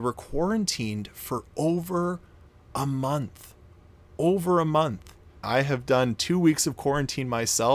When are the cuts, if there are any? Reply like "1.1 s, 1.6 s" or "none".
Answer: 5.4 s